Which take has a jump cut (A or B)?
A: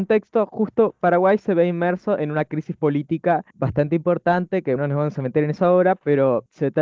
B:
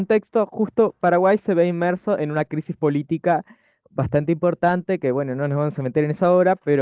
A